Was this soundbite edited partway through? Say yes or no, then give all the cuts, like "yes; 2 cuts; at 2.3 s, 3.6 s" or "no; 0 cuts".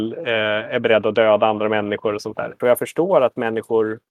yes; 1 cut; at 2.6 s